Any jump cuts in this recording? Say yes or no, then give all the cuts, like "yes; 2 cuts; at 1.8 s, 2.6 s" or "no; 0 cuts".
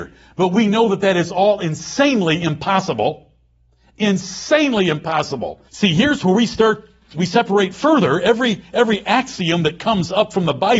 yes; 1 cut; at 5.7 s